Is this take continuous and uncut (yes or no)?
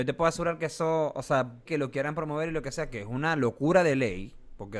no